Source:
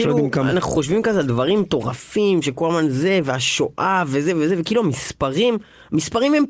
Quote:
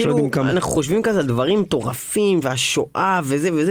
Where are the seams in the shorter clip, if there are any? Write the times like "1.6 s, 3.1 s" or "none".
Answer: 2.4 s